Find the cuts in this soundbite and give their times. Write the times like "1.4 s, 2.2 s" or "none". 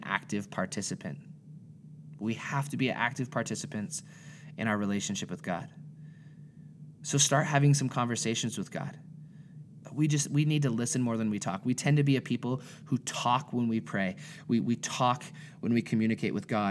9.8 s